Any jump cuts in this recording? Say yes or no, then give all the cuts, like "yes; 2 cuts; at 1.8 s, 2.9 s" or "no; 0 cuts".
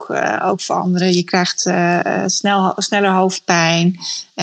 no; 0 cuts